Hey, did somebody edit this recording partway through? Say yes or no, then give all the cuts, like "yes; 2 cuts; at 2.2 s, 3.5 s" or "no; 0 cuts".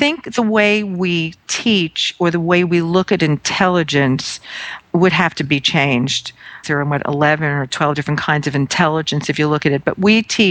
yes; 1 cut; at 6.6 s